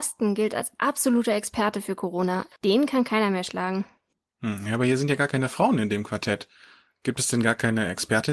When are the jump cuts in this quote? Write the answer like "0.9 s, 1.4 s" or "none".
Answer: none